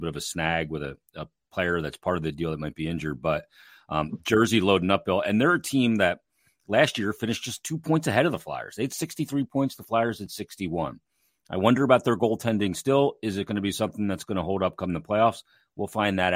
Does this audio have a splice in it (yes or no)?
no